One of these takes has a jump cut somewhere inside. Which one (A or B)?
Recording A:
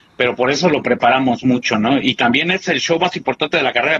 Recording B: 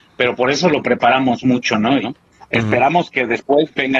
B